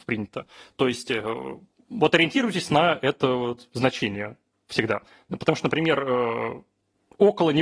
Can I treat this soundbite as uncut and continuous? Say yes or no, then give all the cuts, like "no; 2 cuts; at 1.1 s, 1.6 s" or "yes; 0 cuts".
yes; 0 cuts